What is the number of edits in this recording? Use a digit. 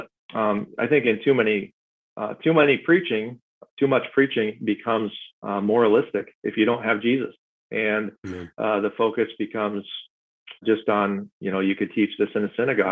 1